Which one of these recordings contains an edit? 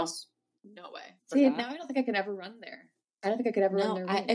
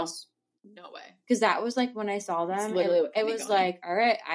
first; 1 cut; at 1.2 s

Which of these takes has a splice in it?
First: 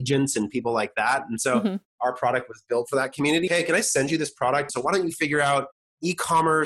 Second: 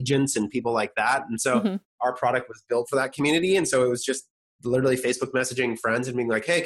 first; 2 cuts; at 3.5 s, 4.7 s

